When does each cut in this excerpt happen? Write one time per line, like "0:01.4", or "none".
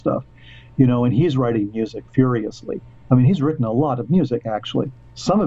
none